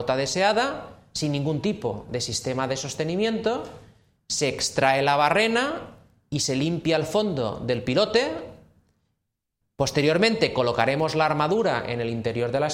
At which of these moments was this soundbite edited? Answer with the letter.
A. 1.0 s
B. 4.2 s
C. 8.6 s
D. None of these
D